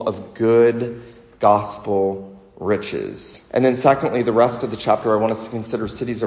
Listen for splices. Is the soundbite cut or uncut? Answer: cut